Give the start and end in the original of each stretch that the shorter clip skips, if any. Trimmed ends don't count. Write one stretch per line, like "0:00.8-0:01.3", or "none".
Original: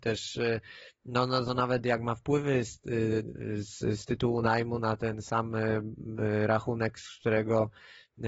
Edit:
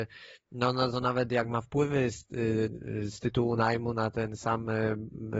0:03.7-0:04.0